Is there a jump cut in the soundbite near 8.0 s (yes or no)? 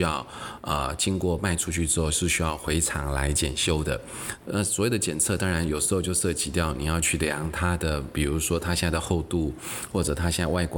no